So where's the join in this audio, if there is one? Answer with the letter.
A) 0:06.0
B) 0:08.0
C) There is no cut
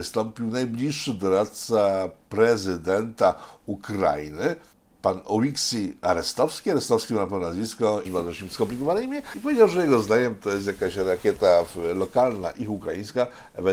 B